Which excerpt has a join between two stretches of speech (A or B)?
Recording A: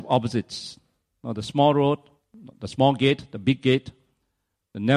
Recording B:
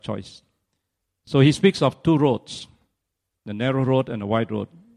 B